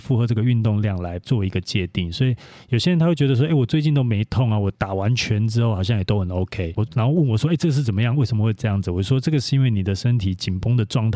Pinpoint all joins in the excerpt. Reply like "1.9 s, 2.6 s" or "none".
6.8 s